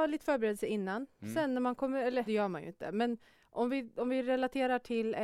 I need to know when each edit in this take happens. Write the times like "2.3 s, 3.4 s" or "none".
2.3 s